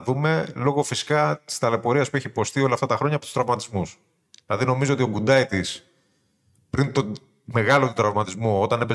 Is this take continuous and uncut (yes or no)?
yes